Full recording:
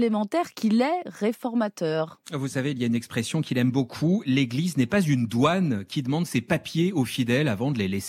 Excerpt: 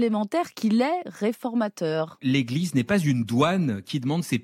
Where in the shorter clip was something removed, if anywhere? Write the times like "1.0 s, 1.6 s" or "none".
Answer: 2.2 s